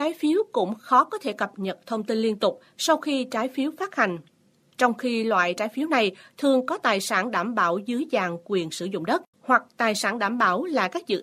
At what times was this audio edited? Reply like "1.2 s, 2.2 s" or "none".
9.3 s